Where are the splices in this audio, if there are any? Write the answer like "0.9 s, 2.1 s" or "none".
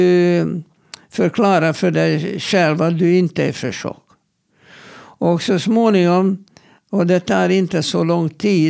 none